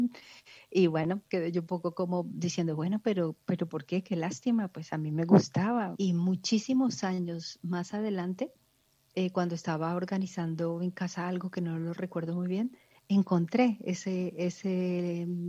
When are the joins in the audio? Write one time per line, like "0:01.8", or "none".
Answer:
0:05.9